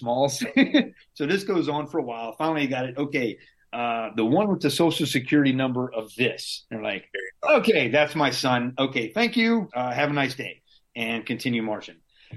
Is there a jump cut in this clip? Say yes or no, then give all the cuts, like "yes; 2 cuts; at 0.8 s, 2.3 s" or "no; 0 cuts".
yes; 1 cut; at 9.7 s